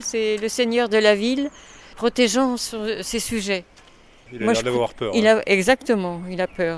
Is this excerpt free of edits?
yes; 0 cuts

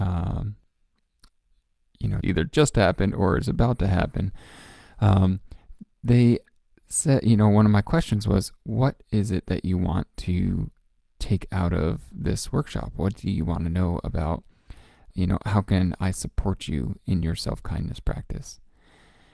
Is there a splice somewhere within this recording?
yes; 2 cuts; at 2.2 s, 15.1 s

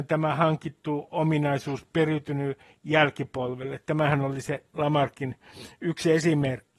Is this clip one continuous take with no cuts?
yes; 0 cuts

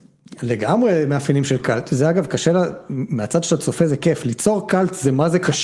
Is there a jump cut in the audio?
no; 0 cuts

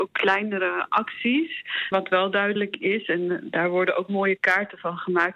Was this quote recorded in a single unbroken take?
no; 1 cut; at 1.9 s

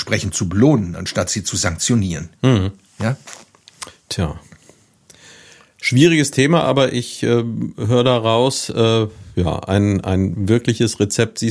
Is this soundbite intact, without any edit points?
yes; 0 cuts

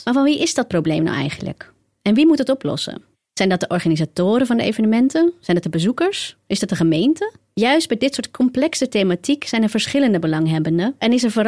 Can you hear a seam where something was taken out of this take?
no; 0 cuts

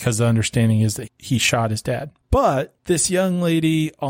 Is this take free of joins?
no; 1 cut; at 1.1 s

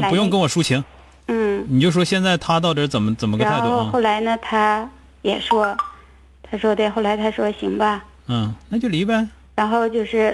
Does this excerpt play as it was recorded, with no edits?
no; 1 cut; at 8.6 s

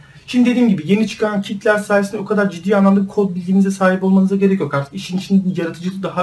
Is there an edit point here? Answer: no; 0 cuts

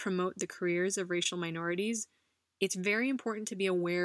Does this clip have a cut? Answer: no; 0 cuts

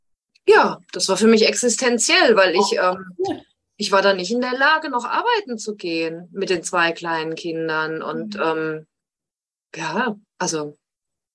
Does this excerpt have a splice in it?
no; 0 cuts

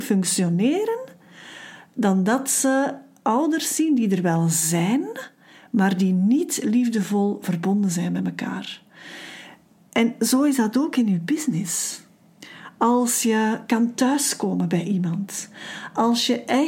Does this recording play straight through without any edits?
yes; 0 cuts

